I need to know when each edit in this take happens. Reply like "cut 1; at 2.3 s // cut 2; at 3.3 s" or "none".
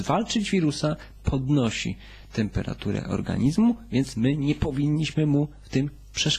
none